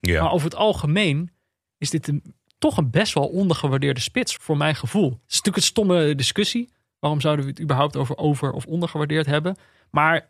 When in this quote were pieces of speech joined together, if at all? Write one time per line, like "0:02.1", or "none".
0:04.4